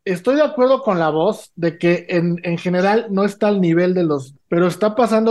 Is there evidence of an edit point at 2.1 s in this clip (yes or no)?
no